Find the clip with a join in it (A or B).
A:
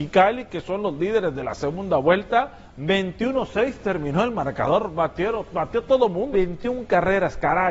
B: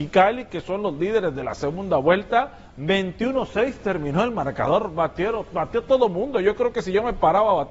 A